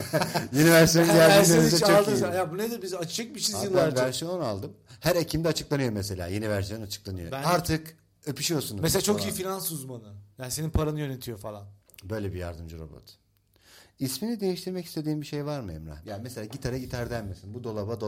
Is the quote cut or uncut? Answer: cut